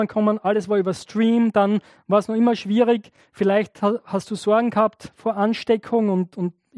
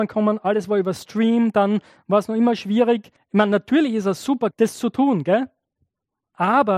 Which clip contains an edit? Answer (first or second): second